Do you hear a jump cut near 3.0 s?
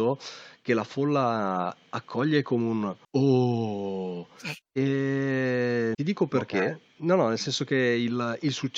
yes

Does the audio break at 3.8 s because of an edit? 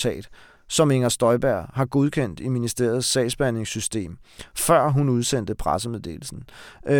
no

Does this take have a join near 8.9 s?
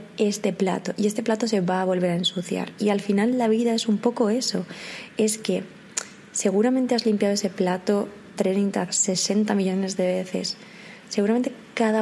yes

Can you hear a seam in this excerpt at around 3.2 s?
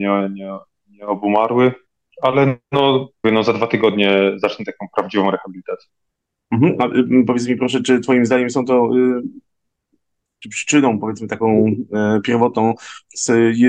yes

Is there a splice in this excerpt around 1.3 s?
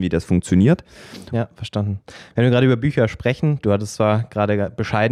yes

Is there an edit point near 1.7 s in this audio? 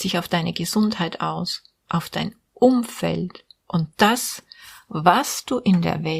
no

